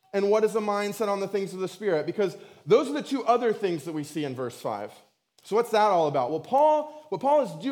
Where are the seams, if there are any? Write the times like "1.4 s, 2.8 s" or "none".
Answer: none